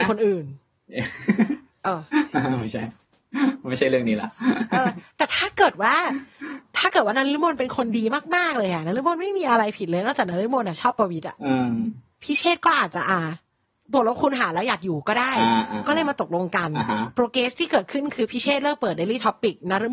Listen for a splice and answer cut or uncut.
uncut